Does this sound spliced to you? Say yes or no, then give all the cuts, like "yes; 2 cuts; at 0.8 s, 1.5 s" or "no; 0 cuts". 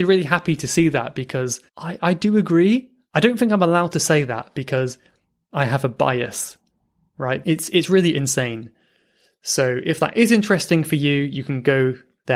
yes; 2 cuts; at 1.7 s, 7.4 s